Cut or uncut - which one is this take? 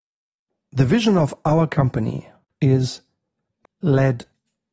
cut